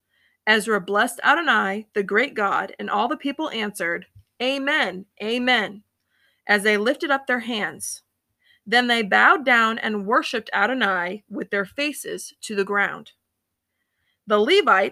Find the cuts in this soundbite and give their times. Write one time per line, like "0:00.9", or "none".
none